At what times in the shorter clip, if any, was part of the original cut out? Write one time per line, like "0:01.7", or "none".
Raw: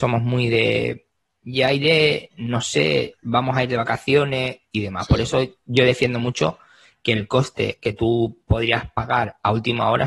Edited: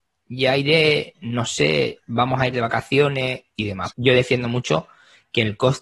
0:03.9